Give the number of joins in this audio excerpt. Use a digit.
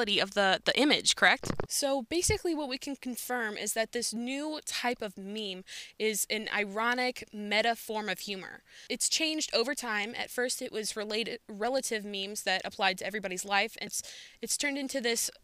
3